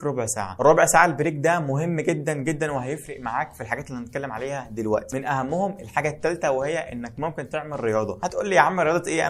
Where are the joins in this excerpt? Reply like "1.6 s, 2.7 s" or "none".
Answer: none